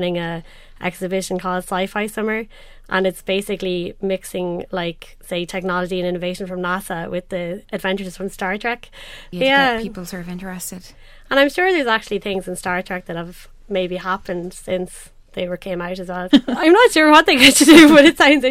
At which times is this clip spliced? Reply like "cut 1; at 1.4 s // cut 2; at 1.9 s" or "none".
cut 1; at 9.3 s // cut 2; at 16.3 s